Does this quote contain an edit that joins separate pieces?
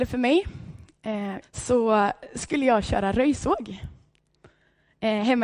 yes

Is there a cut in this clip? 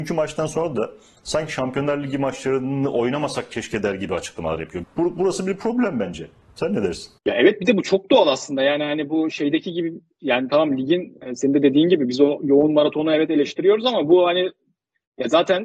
yes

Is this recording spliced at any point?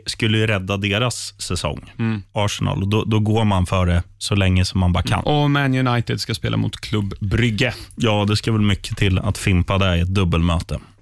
yes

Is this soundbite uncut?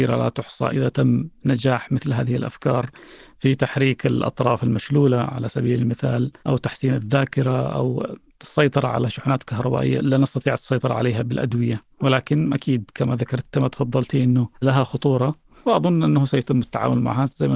no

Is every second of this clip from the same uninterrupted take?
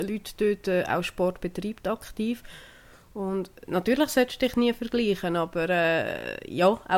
yes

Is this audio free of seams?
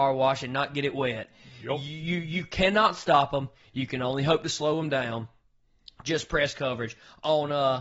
yes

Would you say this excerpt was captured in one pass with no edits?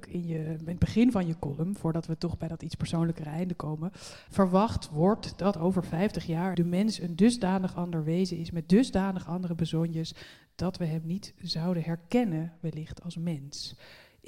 no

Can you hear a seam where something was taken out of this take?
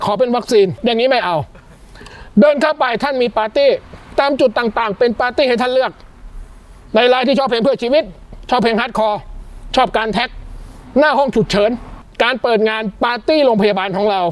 no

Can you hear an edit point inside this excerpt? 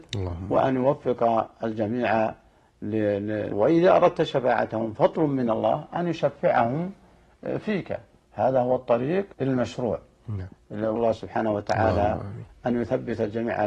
yes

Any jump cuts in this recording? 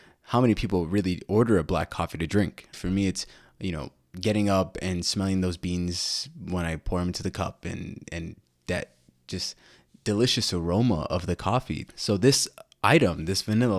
yes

